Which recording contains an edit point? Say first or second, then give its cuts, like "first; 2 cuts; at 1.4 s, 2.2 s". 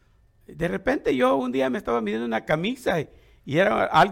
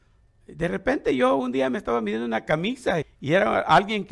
second; 1 cut; at 3.0 s